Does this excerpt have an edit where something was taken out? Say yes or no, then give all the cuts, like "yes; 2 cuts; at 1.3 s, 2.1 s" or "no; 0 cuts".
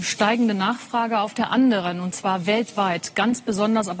no; 0 cuts